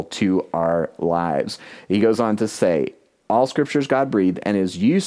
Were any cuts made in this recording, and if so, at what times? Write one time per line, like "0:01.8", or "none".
none